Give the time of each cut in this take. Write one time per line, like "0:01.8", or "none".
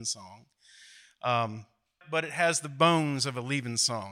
0:02.0